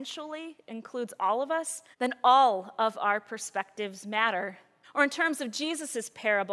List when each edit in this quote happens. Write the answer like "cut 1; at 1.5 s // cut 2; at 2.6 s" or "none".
cut 1; at 1.9 s // cut 2; at 4.8 s

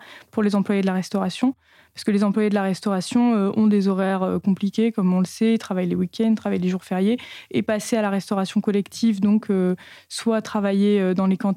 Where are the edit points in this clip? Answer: none

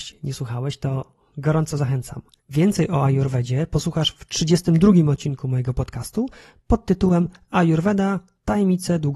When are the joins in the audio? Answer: cut 1; at 2.4 s

